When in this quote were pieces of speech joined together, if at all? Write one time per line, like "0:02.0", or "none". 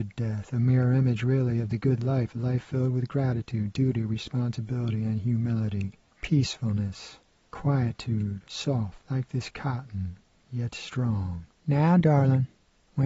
none